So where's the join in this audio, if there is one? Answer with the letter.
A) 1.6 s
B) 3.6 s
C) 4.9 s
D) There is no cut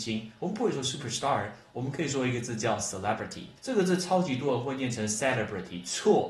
B